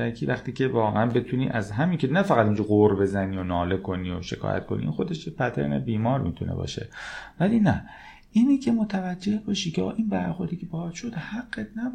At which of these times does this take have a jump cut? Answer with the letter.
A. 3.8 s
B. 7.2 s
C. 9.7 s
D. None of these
D